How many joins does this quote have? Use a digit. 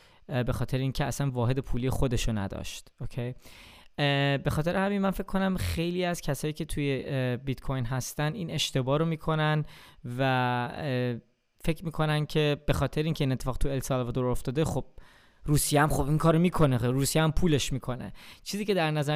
0